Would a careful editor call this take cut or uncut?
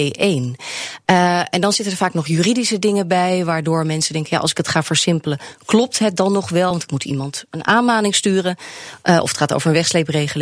uncut